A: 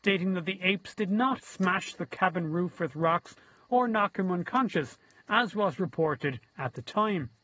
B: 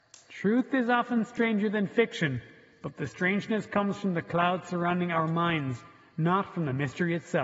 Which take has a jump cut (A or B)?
A